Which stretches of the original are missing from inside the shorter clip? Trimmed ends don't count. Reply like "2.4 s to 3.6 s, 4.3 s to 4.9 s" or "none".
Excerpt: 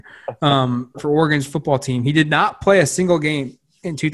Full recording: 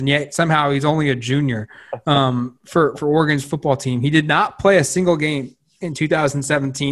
2.6 s to 2.9 s